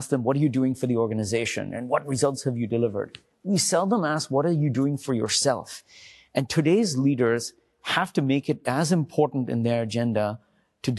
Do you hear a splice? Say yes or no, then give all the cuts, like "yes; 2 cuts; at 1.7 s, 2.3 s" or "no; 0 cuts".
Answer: no; 0 cuts